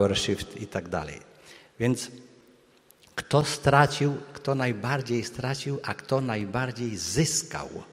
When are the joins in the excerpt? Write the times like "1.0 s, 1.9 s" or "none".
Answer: none